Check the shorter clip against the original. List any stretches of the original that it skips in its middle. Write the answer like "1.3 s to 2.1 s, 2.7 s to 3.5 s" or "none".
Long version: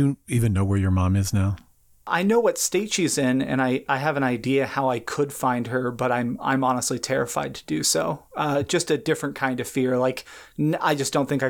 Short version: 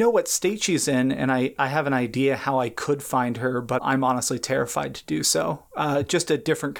6.1 s to 6.4 s